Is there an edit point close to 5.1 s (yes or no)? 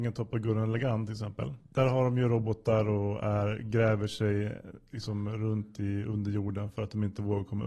no